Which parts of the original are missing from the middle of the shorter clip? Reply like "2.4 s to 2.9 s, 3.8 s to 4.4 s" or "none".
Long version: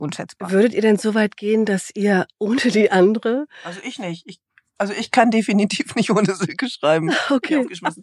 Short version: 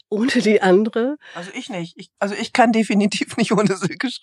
4.4 s to 4.7 s